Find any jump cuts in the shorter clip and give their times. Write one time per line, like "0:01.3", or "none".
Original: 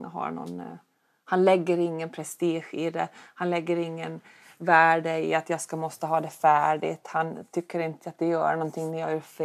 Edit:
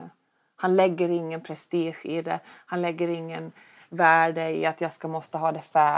none